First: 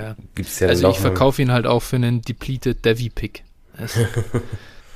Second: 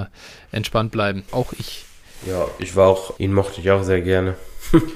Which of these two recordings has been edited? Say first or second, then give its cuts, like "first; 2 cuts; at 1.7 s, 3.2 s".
second; 2 cuts; at 1.3 s, 3.2 s